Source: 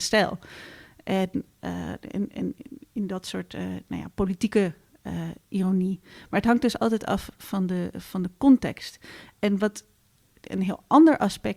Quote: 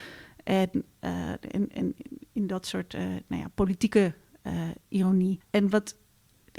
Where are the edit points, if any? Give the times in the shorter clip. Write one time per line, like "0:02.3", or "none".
0:05.4